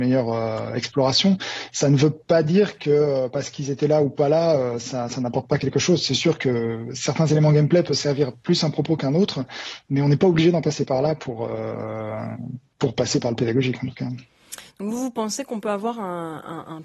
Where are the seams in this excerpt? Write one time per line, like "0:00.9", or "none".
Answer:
none